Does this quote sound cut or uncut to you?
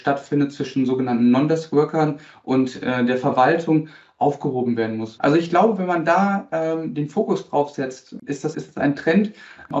cut